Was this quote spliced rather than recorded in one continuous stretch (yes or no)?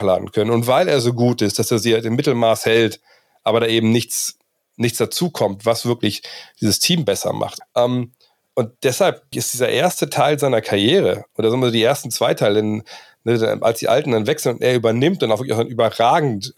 yes